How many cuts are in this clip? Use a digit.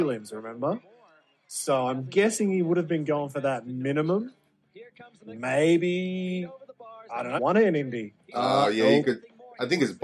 1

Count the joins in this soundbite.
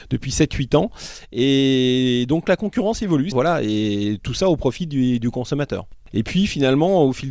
2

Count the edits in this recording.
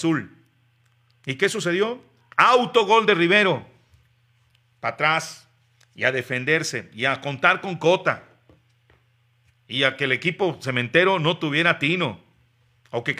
0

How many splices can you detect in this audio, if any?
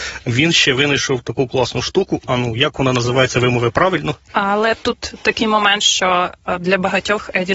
1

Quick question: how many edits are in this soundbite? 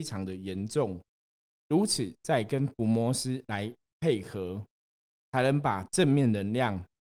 1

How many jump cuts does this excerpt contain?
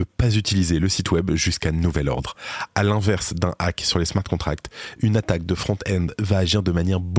0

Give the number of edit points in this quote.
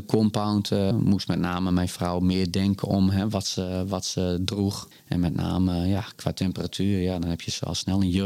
2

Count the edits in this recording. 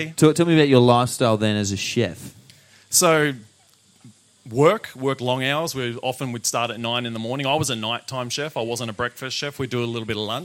0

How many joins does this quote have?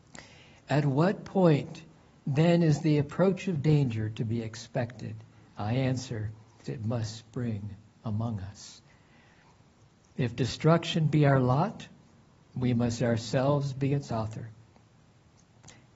1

